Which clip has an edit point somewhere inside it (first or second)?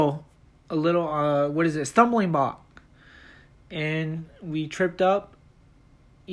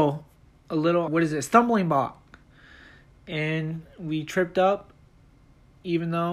second